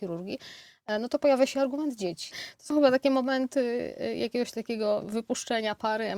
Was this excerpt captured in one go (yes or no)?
no